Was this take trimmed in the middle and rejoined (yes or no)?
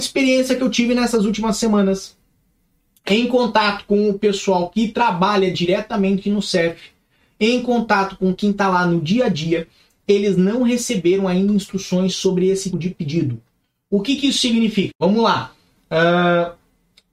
yes